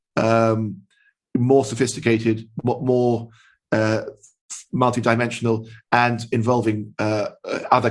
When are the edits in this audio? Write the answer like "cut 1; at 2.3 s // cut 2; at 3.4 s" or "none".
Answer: none